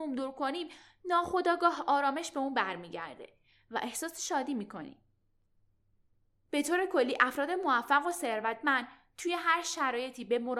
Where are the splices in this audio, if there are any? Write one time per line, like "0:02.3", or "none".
none

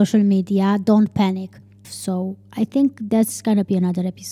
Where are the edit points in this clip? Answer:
0:01.8

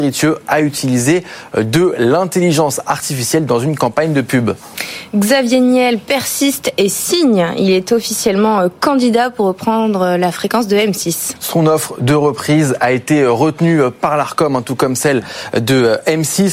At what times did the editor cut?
none

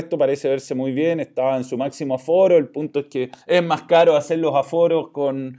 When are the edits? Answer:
0:03.4

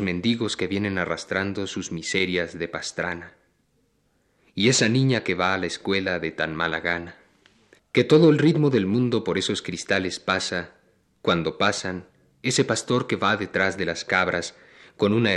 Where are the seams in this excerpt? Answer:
0:07.8

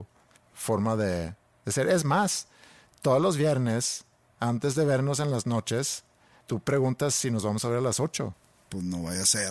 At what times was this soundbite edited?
none

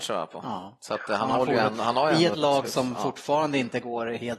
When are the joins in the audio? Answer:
none

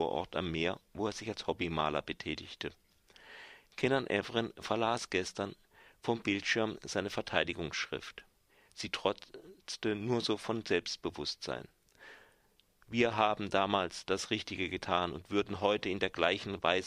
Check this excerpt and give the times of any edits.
none

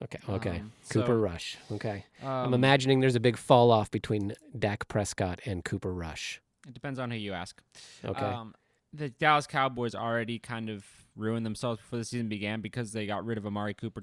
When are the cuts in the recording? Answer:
0:08.8

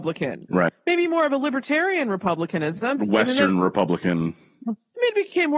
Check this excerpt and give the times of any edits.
0:03.0

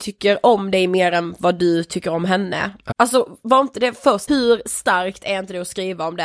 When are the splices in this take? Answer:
0:02.9
0:04.3

